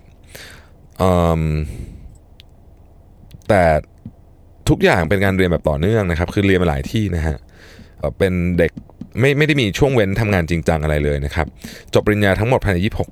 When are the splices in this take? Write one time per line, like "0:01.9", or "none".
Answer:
0:08.0
0:09.1